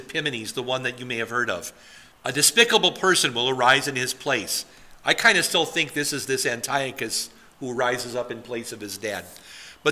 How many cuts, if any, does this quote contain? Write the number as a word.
one